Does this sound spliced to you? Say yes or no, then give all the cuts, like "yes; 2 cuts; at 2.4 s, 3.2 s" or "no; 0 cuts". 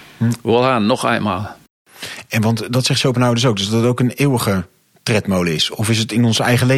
no; 0 cuts